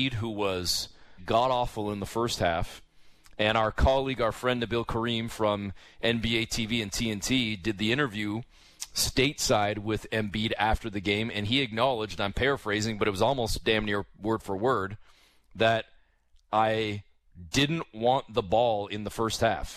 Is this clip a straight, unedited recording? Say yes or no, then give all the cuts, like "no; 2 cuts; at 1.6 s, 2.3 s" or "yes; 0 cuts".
no; 1 cut; at 1.2 s